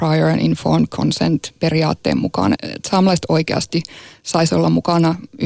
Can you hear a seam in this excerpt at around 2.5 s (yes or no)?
yes